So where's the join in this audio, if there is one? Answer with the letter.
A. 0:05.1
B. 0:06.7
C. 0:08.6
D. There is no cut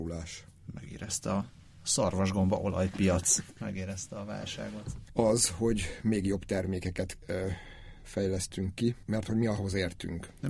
A